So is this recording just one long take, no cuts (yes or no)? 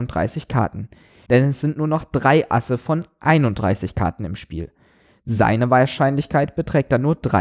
no